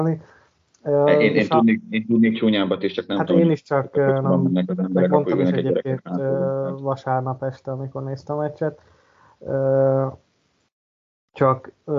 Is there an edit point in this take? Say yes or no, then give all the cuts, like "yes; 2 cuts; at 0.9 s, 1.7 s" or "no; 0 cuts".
no; 0 cuts